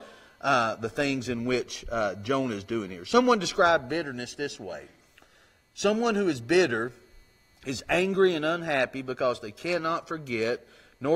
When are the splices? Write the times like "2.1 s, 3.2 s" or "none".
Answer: none